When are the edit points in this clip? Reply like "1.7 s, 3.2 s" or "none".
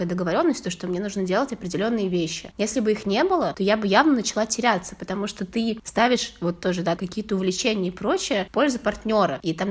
7.0 s